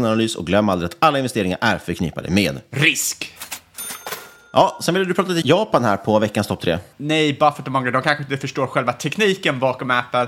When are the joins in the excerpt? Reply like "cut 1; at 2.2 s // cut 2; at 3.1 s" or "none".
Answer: cut 1; at 5.4 s // cut 2; at 6.9 s